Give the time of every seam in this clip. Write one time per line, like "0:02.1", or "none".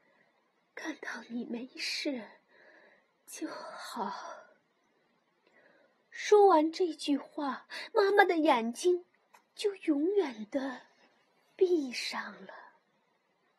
none